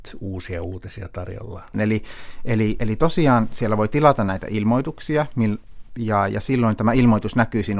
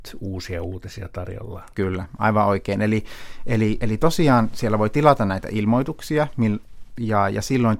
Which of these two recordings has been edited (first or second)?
first